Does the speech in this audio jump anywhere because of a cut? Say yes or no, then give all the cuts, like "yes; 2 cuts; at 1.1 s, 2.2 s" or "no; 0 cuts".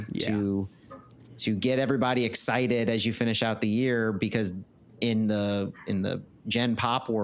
no; 0 cuts